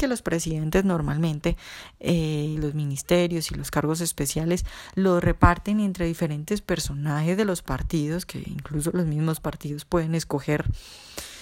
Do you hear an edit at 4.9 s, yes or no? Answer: no